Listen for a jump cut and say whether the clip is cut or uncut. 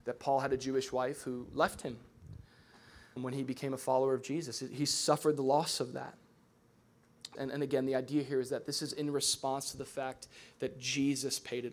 cut